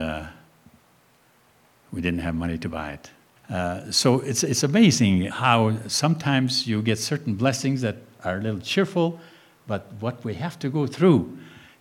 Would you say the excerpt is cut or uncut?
cut